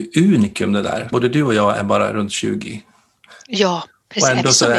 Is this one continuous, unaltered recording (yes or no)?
no